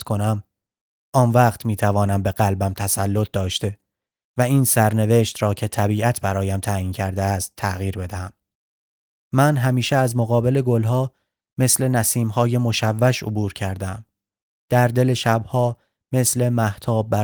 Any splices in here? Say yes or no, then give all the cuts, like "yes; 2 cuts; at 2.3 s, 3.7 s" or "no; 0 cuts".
yes; 2 cuts; at 9.3 s, 14.6 s